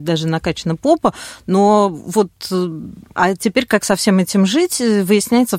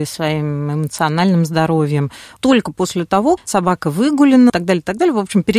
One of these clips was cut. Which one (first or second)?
second